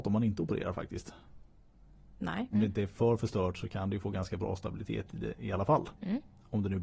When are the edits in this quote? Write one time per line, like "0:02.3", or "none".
0:02.5